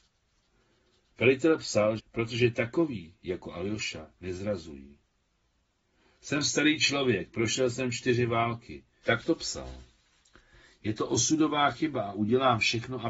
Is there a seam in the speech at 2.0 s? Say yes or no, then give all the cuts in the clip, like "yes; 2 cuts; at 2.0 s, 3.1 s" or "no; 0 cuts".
yes; 2 cuts; at 2.0 s, 9.0 s